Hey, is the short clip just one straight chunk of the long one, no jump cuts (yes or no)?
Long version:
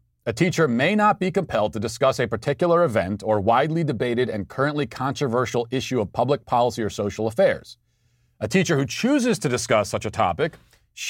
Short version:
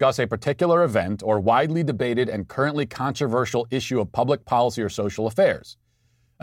yes